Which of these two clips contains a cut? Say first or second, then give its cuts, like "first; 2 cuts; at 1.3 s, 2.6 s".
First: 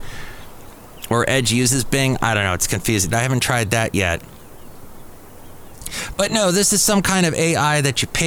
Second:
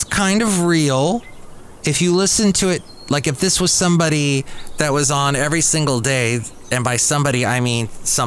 first; 1 cut; at 3.1 s